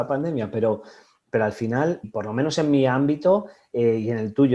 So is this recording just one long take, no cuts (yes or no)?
no